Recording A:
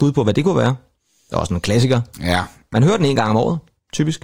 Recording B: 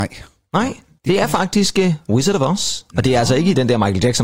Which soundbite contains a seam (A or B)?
A